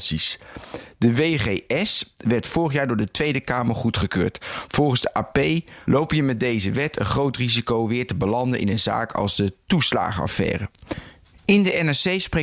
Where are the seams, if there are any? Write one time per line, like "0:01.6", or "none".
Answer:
0:05.8

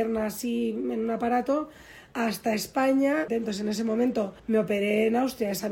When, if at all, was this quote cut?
0:03.3
0:04.4

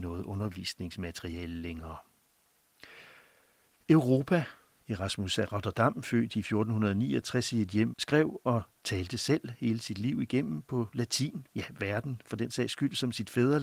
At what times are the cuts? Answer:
0:07.9
0:11.5

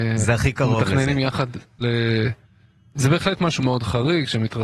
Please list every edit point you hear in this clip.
0:01.8
0:03.6

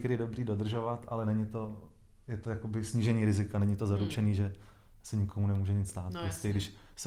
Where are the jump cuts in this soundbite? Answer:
none

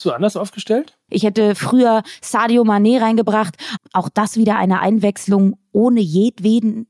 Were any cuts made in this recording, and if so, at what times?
0:01.1
0:03.8

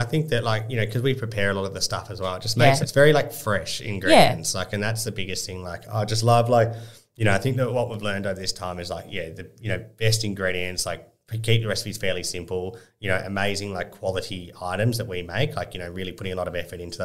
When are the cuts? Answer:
0:02.8

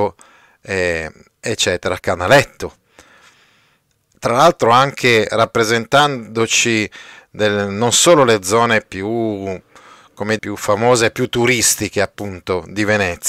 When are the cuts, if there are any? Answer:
0:02.0
0:10.4

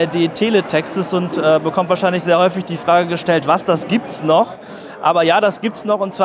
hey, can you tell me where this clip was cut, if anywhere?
none

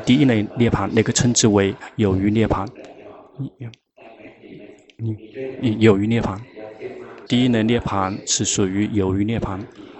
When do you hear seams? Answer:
0:07.3

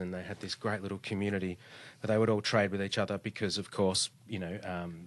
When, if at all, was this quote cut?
0:04.1

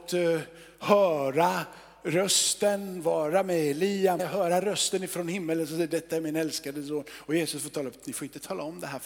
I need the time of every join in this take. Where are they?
0:04.2

